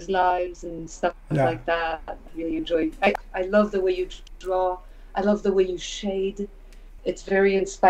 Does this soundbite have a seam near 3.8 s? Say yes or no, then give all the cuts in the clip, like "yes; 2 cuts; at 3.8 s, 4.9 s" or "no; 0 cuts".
no; 2 cuts; at 2.3 s, 7.0 s